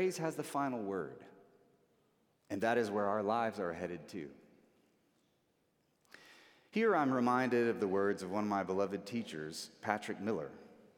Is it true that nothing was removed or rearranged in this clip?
no; 1 cut; at 2.3 s

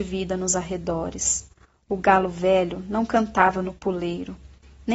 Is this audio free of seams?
yes; 0 cuts

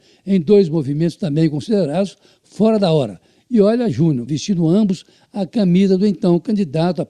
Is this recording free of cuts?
no; 1 cut; at 4.3 s

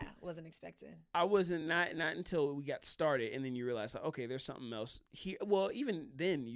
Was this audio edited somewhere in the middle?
no; 0 cuts

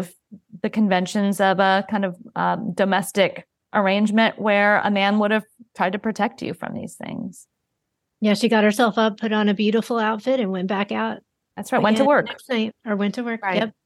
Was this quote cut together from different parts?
no; 0 cuts

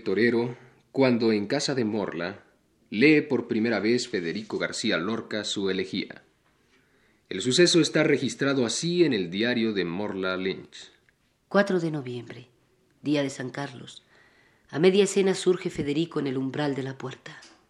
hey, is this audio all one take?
yes; 0 cuts

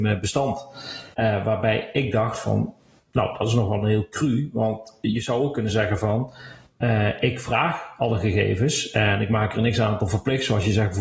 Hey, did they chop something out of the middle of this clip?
yes; 1 cut; at 1.1 s

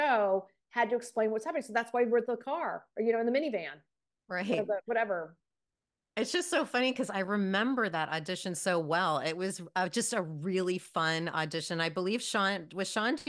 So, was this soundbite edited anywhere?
yes; 1 cut; at 2.2 s

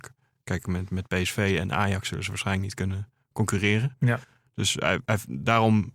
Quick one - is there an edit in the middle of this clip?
yes; 1 cut; at 4.4 s

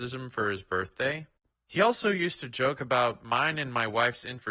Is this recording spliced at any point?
yes; 1 cut; at 1.5 s

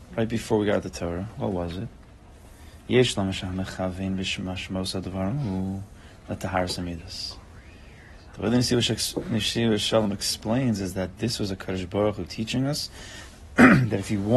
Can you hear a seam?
no; 0 cuts

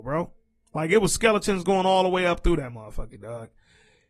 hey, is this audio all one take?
yes; 0 cuts

